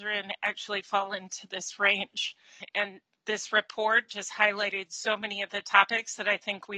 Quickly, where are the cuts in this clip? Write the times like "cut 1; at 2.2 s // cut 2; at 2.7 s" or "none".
none